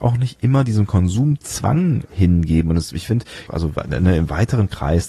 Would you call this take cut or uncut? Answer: cut